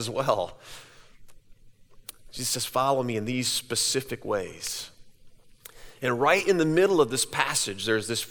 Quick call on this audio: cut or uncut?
uncut